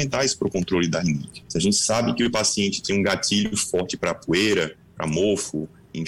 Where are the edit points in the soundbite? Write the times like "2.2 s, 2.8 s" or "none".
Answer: 1.4 s